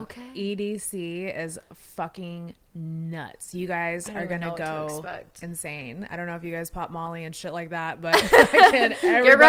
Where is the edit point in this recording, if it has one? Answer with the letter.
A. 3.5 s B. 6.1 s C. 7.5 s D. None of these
D